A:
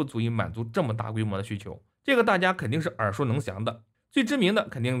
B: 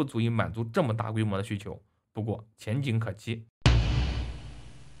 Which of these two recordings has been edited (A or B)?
A